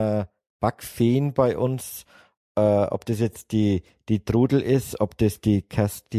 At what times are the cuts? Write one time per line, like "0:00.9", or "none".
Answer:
none